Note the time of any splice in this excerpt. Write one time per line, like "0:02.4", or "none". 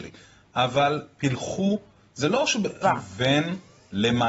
0:02.8

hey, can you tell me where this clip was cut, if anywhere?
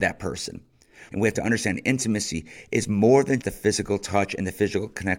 0:01.1
0:03.4

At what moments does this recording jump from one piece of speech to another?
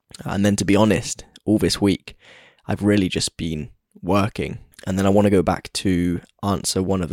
0:04.7

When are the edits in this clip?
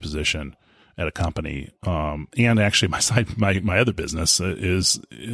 none

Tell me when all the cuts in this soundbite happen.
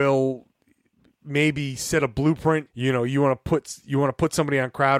0:02.7

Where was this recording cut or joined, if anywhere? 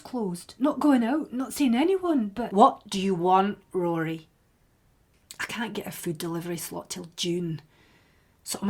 none

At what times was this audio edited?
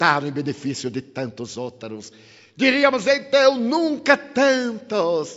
none

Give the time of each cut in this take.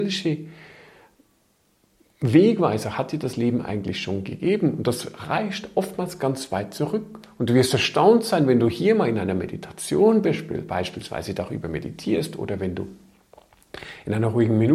none

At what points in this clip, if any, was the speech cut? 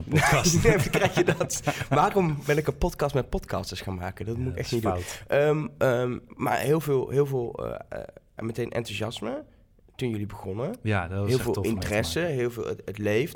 0:06.3

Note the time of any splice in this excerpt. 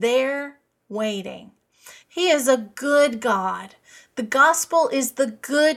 0:02.0

